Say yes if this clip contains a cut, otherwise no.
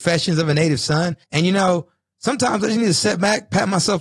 yes